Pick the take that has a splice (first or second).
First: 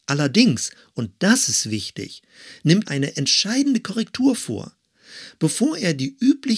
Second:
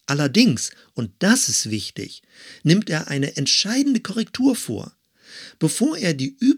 first